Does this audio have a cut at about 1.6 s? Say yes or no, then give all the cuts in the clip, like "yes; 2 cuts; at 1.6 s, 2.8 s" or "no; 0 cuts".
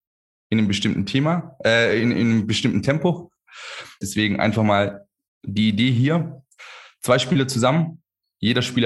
no; 1 cut; at 4.0 s